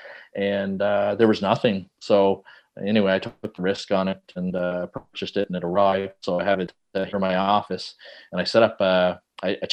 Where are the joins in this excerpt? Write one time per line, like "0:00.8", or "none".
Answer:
none